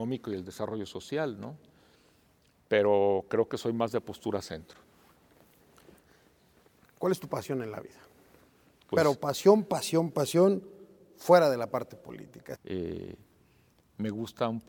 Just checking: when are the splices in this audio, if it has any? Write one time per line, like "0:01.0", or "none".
0:08.9
0:12.6